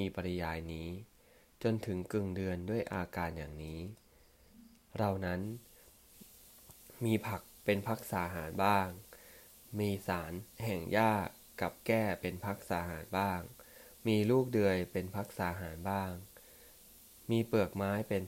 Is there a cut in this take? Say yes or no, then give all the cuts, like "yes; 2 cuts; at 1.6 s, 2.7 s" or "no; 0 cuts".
yes; 1 cut; at 10.5 s